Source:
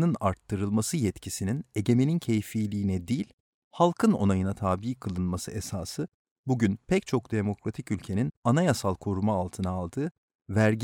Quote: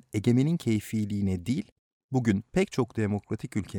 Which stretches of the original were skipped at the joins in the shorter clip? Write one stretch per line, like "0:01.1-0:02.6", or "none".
0:03.6-0:06.4